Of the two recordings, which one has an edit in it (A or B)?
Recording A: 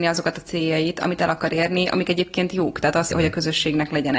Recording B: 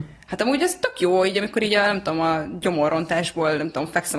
A